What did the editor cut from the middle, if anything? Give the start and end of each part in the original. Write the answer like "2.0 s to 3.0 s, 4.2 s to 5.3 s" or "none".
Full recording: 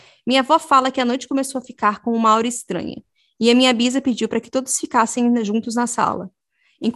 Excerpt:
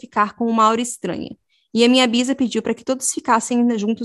none